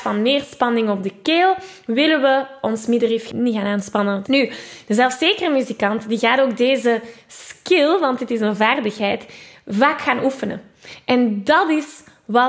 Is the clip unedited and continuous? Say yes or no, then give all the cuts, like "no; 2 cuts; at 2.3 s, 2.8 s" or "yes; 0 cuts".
no; 1 cut; at 4.2 s